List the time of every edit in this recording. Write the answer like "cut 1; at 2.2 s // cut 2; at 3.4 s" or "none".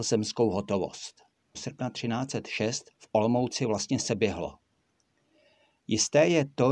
cut 1; at 1.5 s // cut 2; at 2.9 s